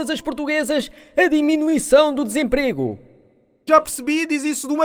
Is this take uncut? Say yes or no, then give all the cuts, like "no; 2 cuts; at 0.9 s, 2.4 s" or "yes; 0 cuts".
no; 1 cut; at 3.7 s